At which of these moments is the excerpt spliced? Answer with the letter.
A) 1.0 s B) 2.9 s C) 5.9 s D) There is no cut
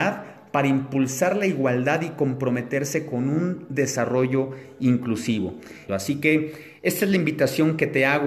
C